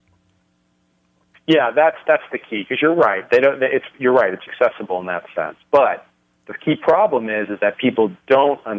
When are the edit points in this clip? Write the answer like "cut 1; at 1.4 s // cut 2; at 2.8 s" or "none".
cut 1; at 1.3 s // cut 2; at 3.3 s // cut 3; at 4.5 s